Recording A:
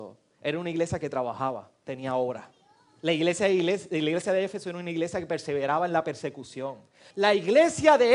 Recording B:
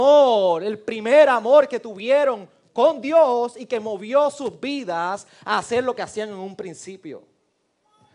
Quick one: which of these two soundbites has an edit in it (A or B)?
A